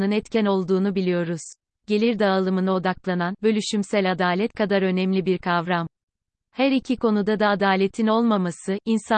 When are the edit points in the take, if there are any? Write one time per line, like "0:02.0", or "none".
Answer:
0:01.8